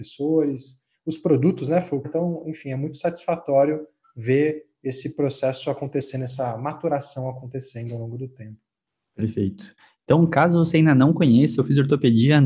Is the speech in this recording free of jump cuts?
no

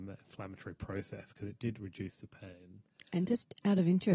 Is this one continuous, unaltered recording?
yes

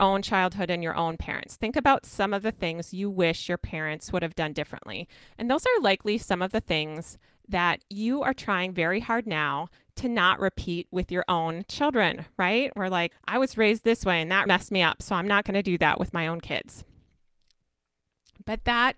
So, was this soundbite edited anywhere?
yes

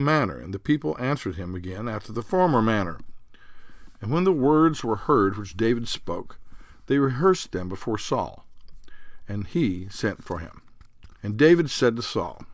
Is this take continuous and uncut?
no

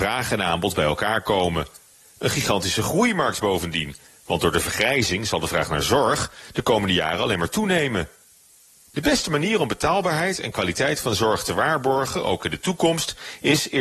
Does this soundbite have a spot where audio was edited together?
no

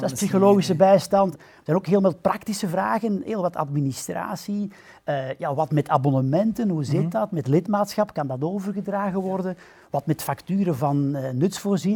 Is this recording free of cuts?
no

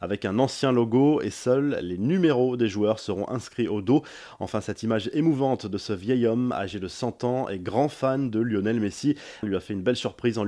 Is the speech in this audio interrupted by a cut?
yes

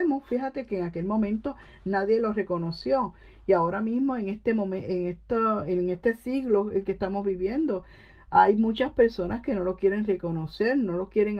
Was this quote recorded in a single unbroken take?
yes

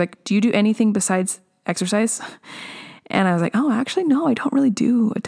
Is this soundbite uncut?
yes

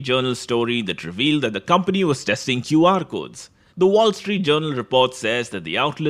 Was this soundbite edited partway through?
yes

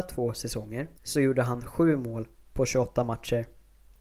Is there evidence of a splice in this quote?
yes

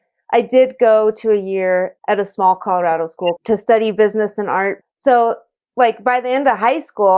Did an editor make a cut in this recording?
yes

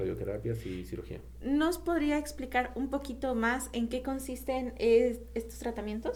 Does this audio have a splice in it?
no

